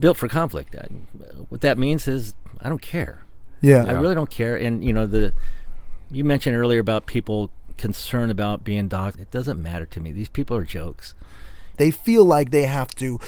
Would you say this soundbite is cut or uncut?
cut